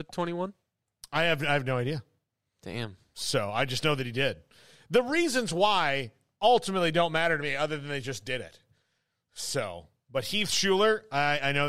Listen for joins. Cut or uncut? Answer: uncut